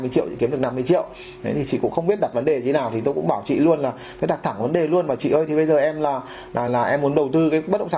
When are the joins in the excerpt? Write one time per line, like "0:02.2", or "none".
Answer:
0:06.7